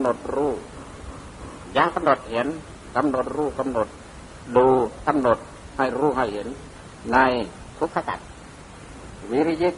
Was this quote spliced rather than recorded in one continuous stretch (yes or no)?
no